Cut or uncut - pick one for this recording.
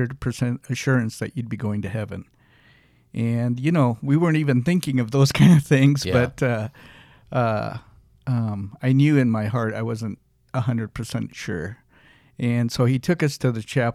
uncut